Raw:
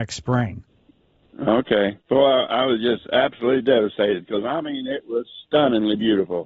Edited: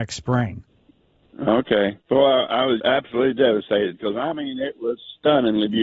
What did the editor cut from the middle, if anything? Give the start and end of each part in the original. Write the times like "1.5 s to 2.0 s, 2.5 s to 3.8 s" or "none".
2.8 s to 3.1 s